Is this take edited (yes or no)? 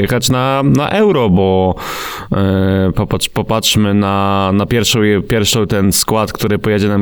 no